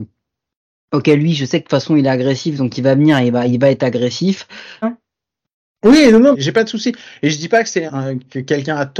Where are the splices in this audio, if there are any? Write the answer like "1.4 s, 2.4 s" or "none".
4.8 s, 6.3 s, 7.9 s